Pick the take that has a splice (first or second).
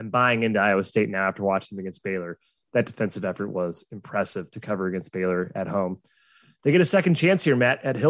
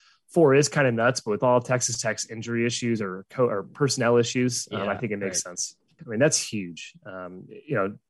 second